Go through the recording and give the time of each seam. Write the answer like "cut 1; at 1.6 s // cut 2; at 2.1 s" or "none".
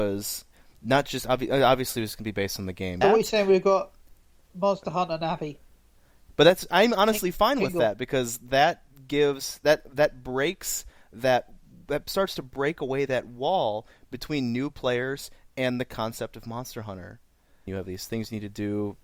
cut 1; at 3.0 s // cut 2; at 6.3 s // cut 3; at 17.7 s